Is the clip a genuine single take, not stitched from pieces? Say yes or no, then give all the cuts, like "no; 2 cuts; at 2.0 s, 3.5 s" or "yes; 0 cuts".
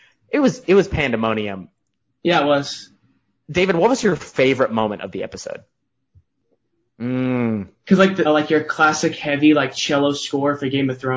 no; 2 cuts; at 6.9 s, 8.2 s